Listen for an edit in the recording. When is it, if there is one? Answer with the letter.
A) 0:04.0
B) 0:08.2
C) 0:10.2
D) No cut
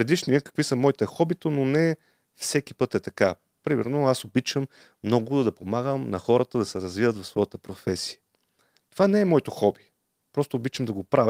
D